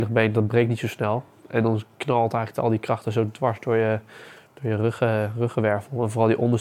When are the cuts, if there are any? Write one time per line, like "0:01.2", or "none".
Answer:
none